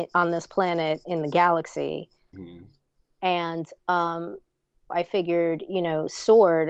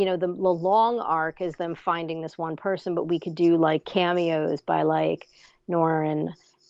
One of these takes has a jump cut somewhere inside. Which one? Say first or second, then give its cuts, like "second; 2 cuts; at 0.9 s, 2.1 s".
first; 2 cuts; at 2.3 s, 4.9 s